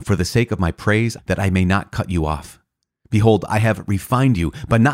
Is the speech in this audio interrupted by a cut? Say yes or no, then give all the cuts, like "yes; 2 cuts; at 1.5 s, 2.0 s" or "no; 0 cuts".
yes; 1 cut; at 1.2 s